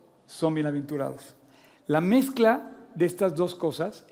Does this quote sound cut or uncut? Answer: uncut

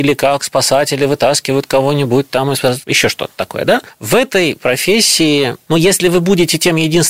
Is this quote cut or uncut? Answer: uncut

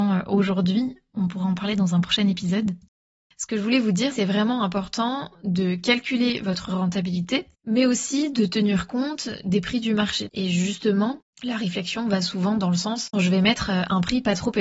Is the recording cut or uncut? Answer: cut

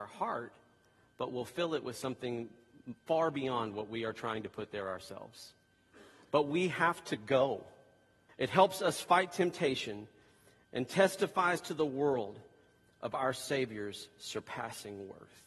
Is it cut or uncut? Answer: cut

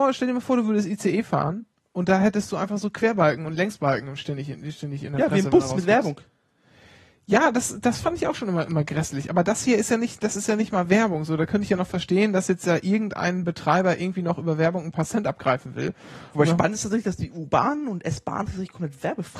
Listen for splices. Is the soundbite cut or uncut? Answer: uncut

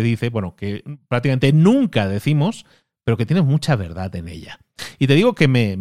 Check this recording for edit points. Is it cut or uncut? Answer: uncut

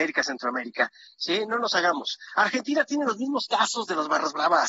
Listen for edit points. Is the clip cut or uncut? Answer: uncut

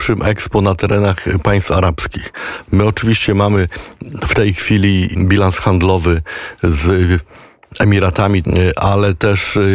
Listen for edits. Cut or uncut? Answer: cut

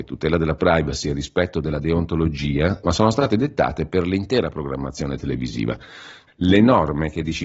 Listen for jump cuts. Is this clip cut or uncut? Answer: cut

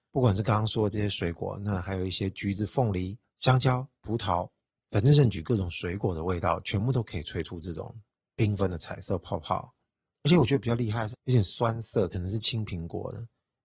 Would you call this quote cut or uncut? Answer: cut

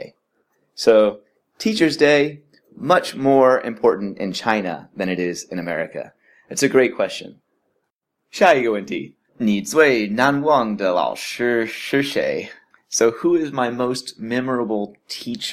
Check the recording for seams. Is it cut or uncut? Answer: cut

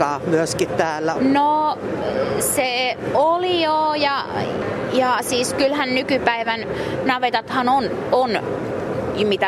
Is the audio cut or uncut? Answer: cut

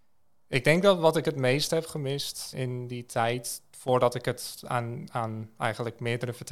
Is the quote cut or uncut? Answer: cut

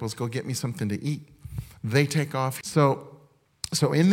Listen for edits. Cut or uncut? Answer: cut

